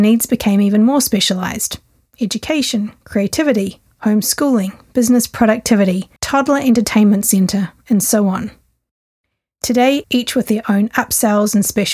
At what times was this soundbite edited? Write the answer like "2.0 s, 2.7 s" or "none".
6.2 s, 10.0 s